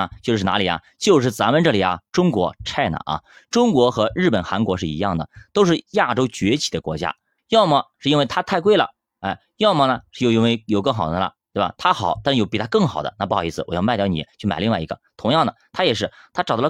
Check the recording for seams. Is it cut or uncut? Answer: cut